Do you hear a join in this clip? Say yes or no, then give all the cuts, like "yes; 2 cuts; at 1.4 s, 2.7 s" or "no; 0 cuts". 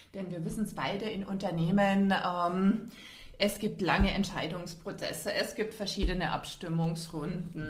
no; 0 cuts